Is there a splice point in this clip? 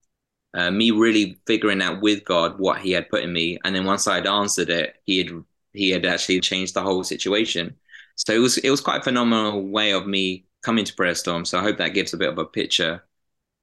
yes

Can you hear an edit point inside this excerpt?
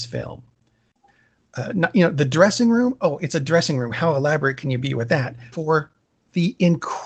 yes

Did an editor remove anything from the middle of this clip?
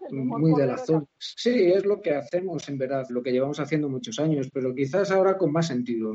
yes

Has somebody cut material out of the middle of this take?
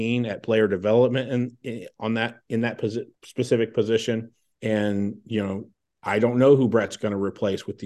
yes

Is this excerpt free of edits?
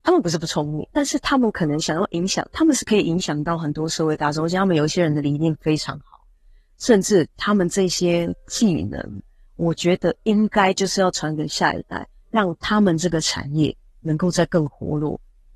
no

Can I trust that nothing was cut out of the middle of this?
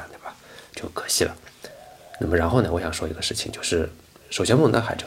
yes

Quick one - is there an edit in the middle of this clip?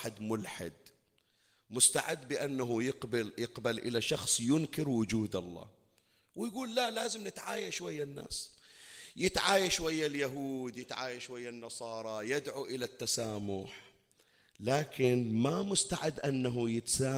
no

